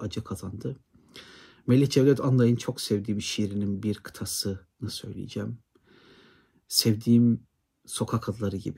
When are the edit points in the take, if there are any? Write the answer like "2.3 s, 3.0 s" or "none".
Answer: none